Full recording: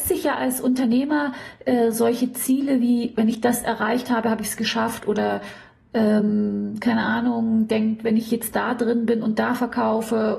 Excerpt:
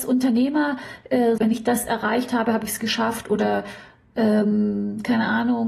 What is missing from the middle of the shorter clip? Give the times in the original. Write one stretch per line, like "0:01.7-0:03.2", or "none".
0:01.9-0:03.2